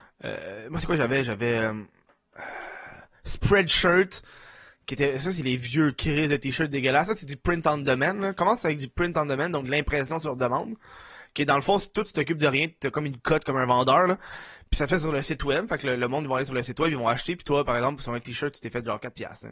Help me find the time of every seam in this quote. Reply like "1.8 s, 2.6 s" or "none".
none